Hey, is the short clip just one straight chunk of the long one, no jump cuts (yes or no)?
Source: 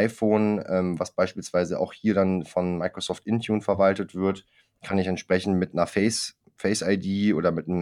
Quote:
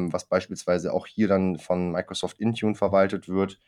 yes